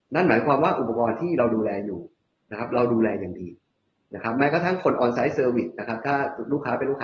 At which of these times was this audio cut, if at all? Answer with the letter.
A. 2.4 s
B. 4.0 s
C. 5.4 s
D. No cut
D